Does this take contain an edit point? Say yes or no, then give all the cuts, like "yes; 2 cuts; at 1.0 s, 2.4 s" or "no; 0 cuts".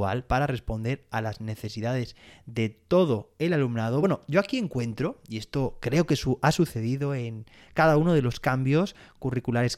no; 0 cuts